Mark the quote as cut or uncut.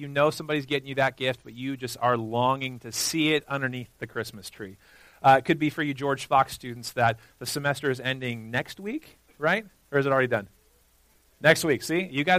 uncut